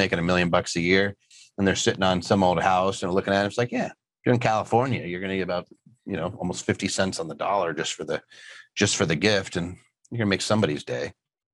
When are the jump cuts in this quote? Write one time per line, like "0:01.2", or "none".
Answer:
none